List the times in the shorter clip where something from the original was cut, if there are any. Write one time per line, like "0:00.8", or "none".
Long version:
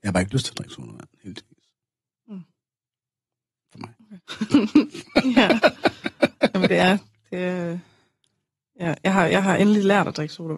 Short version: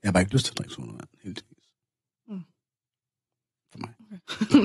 none